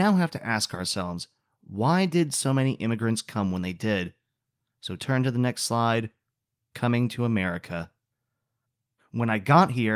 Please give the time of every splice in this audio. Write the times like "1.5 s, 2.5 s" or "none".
9.0 s